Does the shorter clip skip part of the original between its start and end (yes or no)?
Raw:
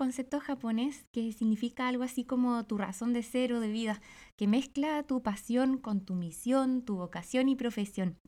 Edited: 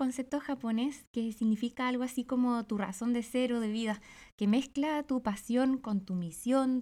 no